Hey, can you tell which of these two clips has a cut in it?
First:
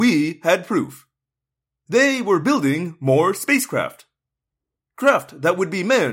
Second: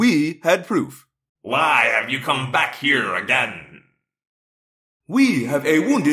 second; 1 cut; at 1.3 s

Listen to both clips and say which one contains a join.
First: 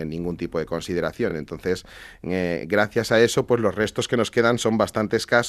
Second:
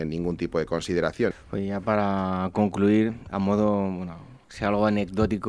second; 1 cut; at 1.3 s

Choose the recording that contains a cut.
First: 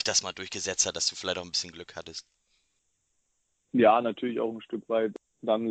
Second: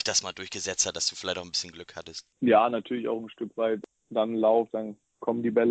second; 2 cuts; at 2.3 s, 4.7 s

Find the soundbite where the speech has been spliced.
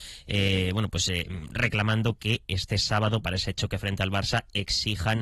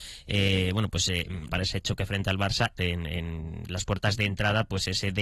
second; 2 cuts; at 1.5 s, 2.8 s

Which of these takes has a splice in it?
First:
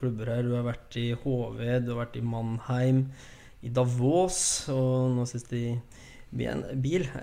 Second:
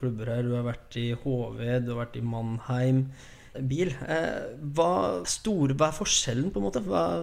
second; 2 cuts; at 3.5 s, 5.2 s

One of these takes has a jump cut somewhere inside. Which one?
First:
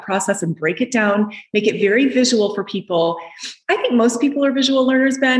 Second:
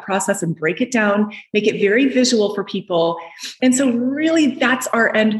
second; 1 cut; at 3.6 s

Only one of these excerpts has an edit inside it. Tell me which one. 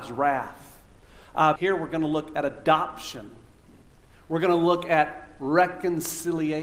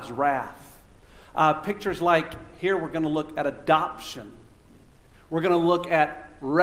first; 1 cut; at 1.6 s

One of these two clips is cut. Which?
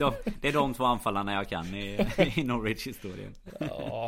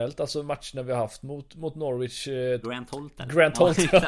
second; 1 cut; at 2.6 s

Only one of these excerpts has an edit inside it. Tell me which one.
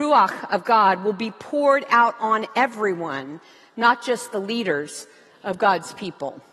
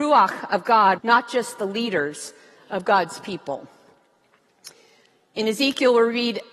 second; 1 cut; at 1.0 s

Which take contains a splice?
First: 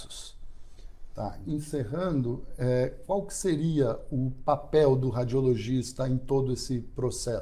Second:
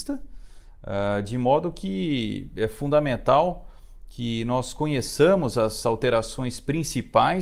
first; 1 cut; at 1.5 s

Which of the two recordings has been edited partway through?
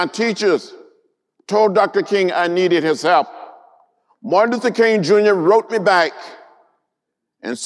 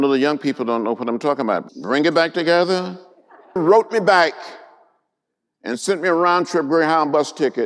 second; 2 cuts; at 1.7 s, 3.6 s

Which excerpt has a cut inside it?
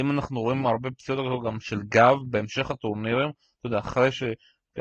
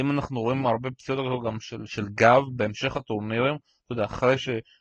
first; 1 cut; at 1.6 s

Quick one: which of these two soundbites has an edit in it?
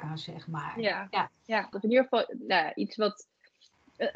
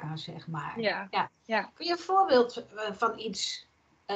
first; 1 cut; at 1.7 s

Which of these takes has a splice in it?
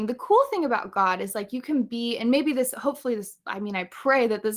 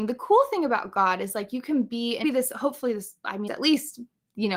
second; 2 cuts; at 2.2 s, 3.5 s

